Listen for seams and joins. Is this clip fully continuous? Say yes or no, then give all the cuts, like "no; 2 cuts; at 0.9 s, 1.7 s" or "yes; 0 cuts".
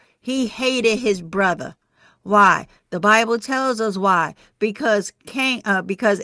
yes; 0 cuts